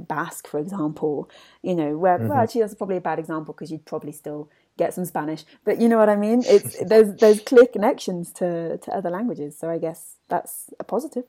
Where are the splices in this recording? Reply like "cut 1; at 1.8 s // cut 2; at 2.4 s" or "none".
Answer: none